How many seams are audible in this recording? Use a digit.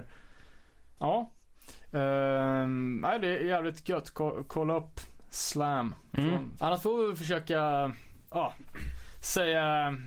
2